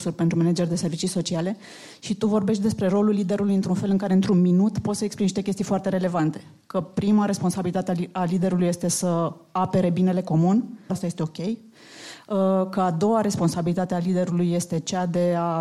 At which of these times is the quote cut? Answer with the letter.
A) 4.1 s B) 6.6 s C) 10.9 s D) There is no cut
C